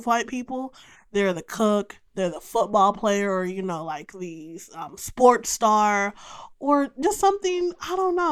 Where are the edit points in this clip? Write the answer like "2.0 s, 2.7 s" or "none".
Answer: none